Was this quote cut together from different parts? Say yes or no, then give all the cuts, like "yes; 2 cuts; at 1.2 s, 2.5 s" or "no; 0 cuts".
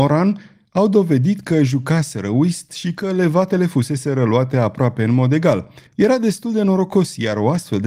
yes; 1 cut; at 5.9 s